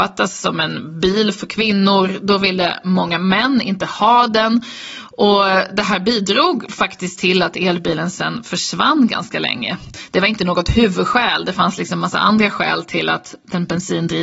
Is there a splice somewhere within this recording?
no; 0 cuts

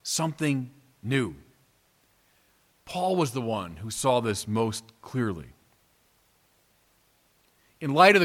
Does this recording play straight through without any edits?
yes; 0 cuts

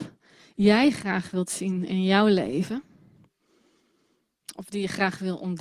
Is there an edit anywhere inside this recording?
no; 0 cuts

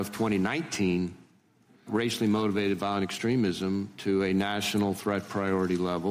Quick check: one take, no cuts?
no; 1 cut; at 1.9 s

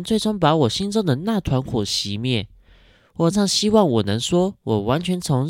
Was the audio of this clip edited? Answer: yes; 1 cut; at 3.3 s

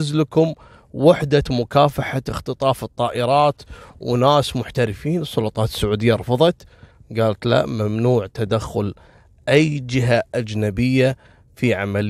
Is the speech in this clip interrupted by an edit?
no; 0 cuts

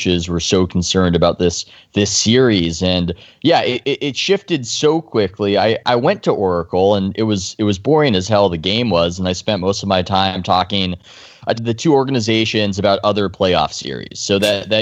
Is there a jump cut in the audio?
yes; 1 cut; at 11.5 s

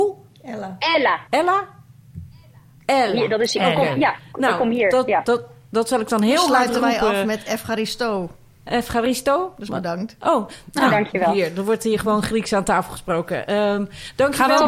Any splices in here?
no; 0 cuts

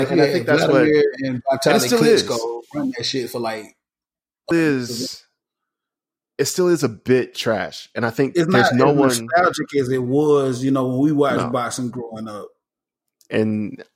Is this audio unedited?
no; 1 cut; at 4.5 s

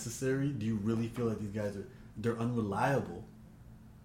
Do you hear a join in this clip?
yes; 1 cut; at 2.1 s

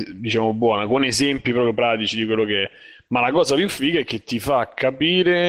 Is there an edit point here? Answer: no; 0 cuts

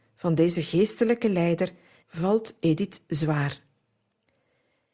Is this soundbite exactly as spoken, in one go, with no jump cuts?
no; 1 cut; at 2.0 s

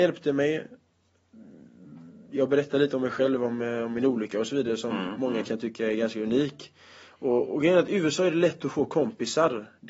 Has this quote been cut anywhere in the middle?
no; 0 cuts

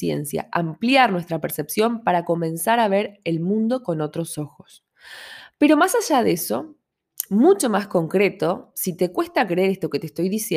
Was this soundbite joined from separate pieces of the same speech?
no; 0 cuts

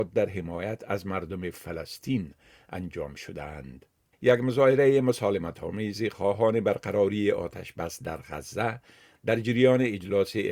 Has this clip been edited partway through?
yes; 1 cut; at 4.1 s

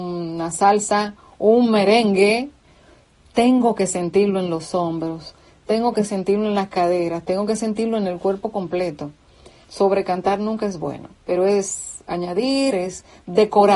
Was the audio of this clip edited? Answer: yes; 3 cuts; at 9.6 s, 11.2 s, 12.7 s

